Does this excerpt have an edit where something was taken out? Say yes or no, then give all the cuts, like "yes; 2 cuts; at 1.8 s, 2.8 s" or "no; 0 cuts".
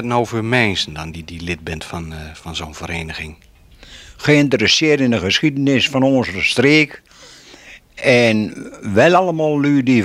no; 0 cuts